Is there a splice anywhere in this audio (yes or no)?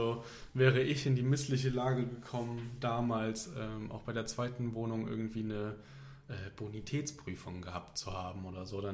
no